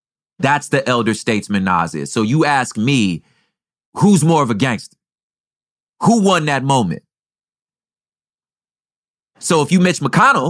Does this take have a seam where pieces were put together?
no; 0 cuts

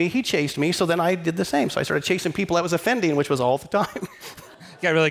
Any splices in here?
no; 0 cuts

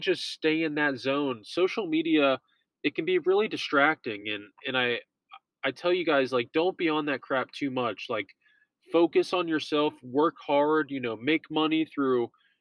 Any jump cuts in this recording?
no; 0 cuts

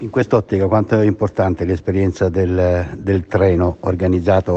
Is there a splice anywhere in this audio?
no; 0 cuts

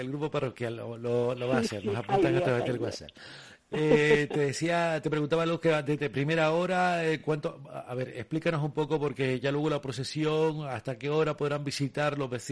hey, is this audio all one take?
yes; 0 cuts

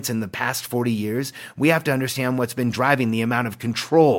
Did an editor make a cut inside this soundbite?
no; 0 cuts

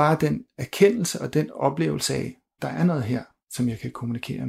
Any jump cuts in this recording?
yes; 1 cut; at 2.6 s

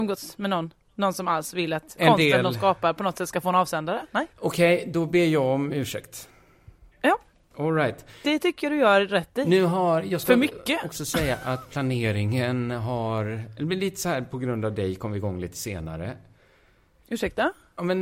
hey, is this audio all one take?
no; 2 cuts; at 2.0 s, 4.3 s

